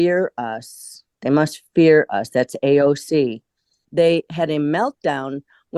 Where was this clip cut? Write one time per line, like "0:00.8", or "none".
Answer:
0:03.8